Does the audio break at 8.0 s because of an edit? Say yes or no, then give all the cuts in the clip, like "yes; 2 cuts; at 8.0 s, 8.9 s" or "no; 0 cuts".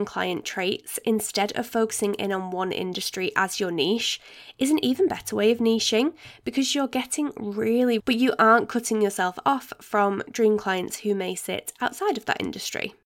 yes; 1 cut; at 8.0 s